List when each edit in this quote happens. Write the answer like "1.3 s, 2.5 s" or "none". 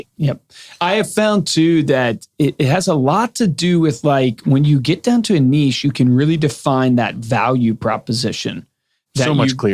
none